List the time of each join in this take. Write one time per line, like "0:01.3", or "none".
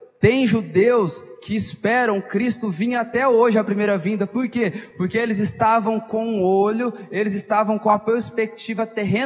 none

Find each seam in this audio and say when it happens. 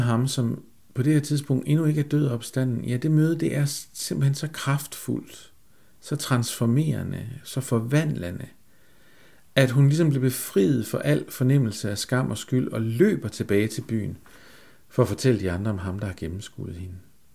none

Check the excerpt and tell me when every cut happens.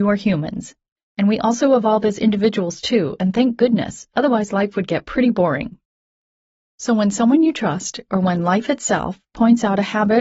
0:01.0

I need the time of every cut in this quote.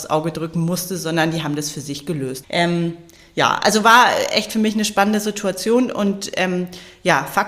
0:02.4

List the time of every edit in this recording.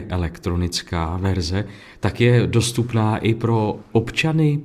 none

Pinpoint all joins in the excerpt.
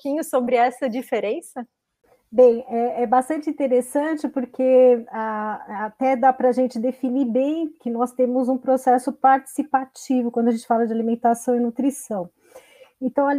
none

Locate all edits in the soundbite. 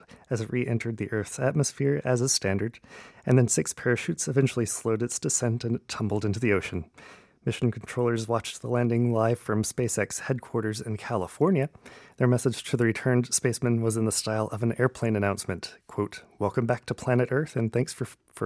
none

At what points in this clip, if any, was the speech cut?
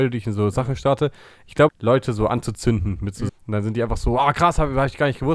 0:01.7
0:03.3

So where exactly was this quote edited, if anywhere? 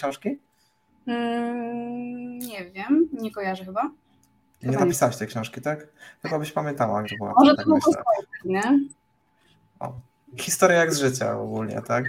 0:07.0
0:10.4

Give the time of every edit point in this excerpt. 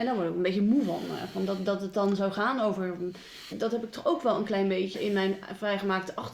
0:03.5
0:04.9

